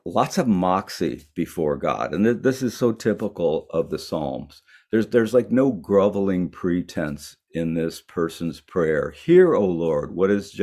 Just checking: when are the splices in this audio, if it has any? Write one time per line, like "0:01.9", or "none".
none